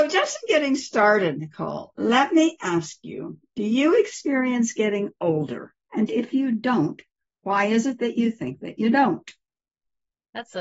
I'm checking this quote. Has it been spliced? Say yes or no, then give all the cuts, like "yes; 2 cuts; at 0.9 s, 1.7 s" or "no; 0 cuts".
yes; 1 cut; at 5.8 s